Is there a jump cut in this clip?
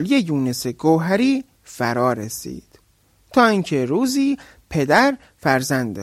no; 0 cuts

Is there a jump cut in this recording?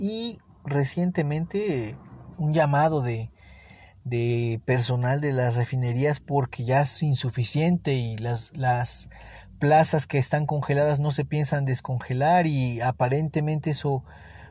yes; 1 cut; at 2.3 s

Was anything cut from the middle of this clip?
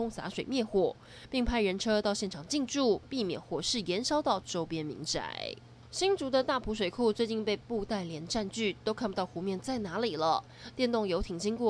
no; 0 cuts

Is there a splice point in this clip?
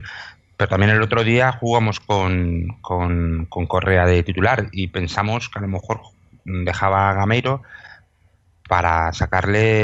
no; 0 cuts

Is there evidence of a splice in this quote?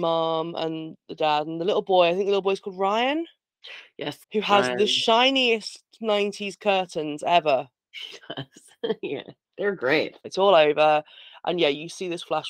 yes; 2 cuts; at 4.2 s, 10.2 s

